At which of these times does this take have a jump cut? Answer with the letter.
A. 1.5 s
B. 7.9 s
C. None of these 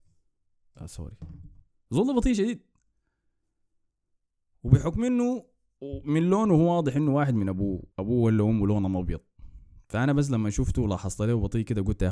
B